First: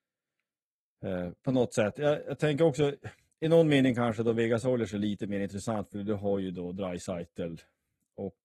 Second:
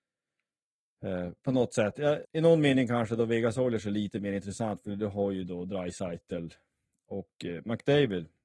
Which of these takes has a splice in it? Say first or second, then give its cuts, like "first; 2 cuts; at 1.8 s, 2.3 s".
second; 1 cut; at 2.2 s